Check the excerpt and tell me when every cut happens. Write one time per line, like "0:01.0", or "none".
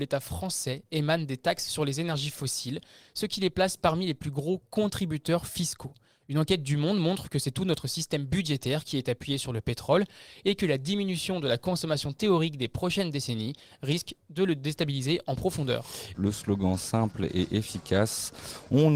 0:16.1